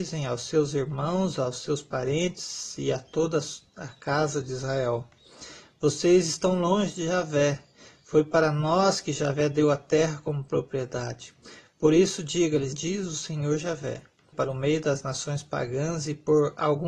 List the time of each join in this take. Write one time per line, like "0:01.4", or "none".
0:12.7
0:14.3

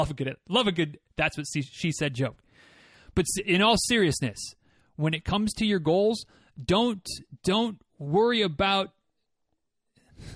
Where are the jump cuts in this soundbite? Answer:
none

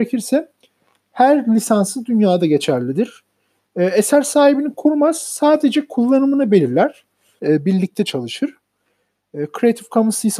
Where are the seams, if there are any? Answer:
0:07.4

